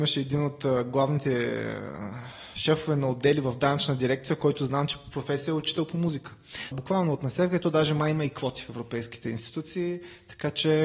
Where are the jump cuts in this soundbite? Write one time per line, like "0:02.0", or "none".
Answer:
0:06.7